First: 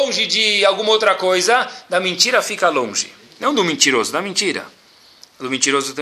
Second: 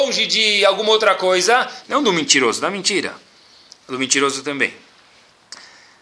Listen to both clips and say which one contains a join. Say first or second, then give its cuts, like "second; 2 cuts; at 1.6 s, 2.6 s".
second; 1 cut; at 1.8 s